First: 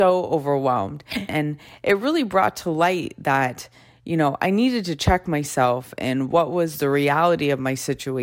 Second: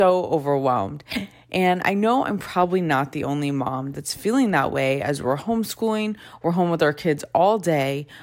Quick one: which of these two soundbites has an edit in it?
first; 1 cut; at 1.3 s

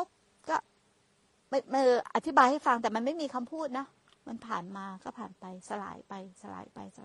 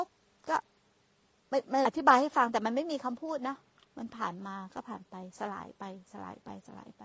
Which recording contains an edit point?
second; 1 cut; at 1.8 s

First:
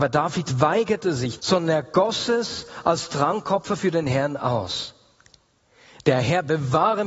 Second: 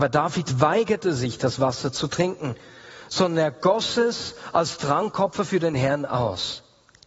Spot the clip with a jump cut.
first; 1 cut; at 1.4 s

